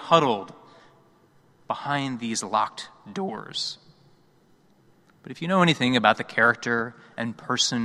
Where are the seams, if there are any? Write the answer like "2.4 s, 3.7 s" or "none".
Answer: none

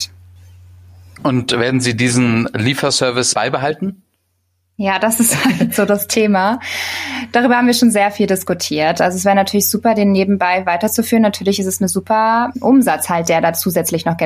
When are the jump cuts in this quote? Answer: none

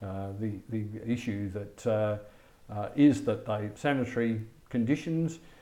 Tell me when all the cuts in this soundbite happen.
3.8 s

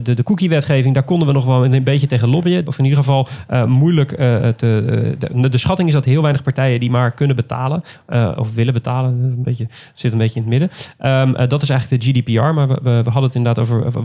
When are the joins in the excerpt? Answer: 2.7 s

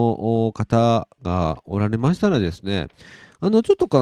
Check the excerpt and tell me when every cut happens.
none

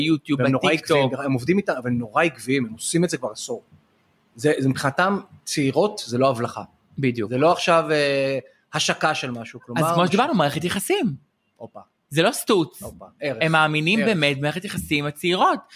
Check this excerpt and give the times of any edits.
none

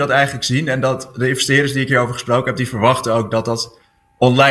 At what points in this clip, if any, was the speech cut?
none

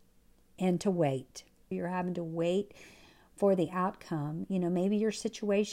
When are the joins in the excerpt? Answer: 1.7 s

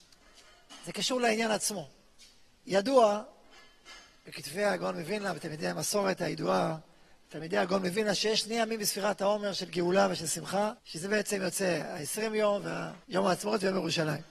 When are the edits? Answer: 10.8 s, 13.0 s

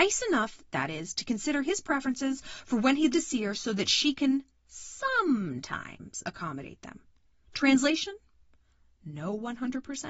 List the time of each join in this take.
3.1 s

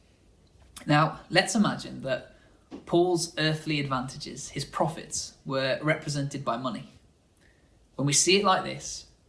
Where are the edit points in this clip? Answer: none

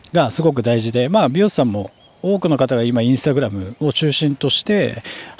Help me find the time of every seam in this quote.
none

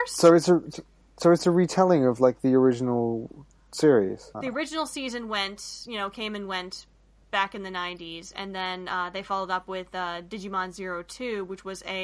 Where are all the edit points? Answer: 4.3 s

